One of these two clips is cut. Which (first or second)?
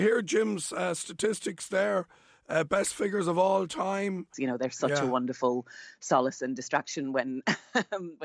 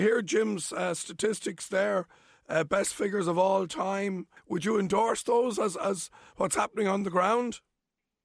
first